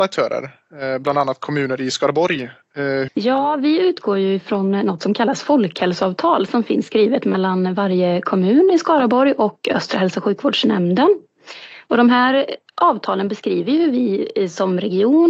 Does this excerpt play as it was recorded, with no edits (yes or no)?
no